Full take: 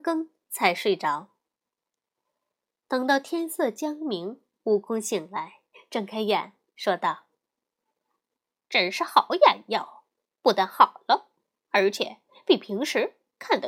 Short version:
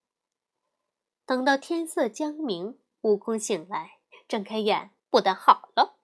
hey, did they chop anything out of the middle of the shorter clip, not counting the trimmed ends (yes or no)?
yes